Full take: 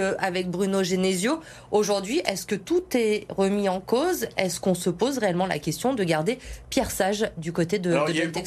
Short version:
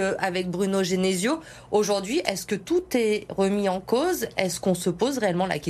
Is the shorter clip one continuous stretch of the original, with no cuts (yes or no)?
yes